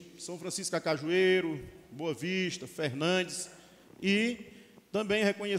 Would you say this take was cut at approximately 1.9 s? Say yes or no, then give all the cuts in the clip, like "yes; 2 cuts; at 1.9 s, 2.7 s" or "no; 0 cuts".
no; 1 cut; at 3.9 s